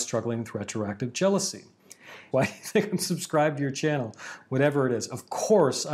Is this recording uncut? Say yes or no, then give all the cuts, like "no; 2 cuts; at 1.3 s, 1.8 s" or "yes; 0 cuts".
no; 2 cuts; at 2.3 s, 4.4 s